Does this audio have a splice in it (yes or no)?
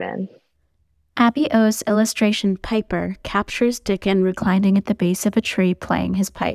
no